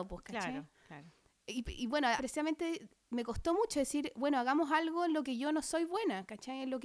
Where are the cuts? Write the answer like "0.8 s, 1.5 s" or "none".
2.2 s